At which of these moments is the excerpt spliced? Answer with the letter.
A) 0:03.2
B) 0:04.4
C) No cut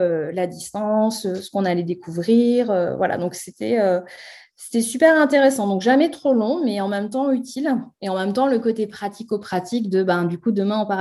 C